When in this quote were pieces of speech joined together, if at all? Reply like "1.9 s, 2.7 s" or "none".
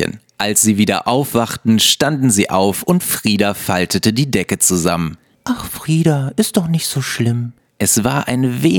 5.3 s, 7.6 s